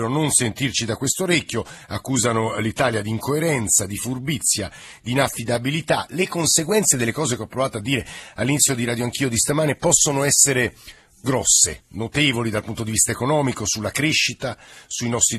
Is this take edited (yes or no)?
no